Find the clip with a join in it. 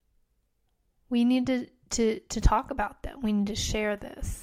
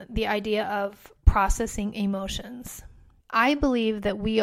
second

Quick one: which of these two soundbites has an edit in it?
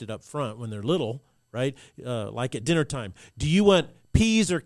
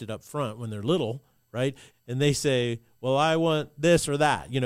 second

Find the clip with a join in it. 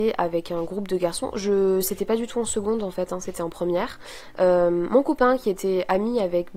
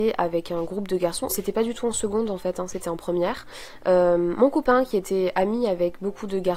second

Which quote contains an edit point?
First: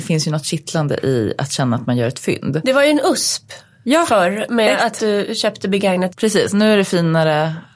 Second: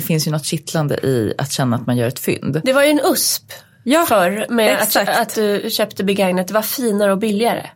first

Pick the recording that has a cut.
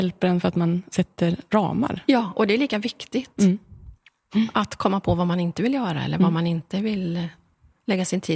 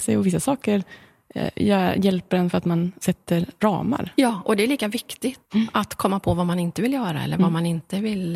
second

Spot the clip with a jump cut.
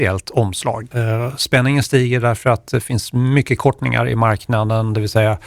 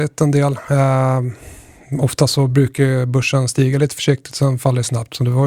first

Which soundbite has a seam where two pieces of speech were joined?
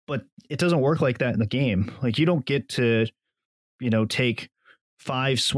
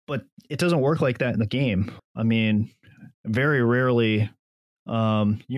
second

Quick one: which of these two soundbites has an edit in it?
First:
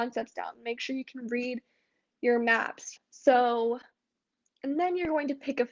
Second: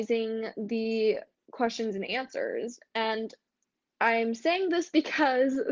first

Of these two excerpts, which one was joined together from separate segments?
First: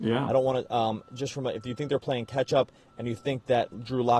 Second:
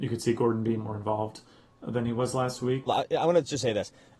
second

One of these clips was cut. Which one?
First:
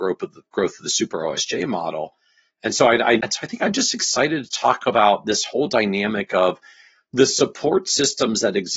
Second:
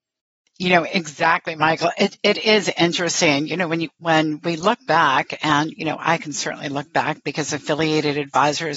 first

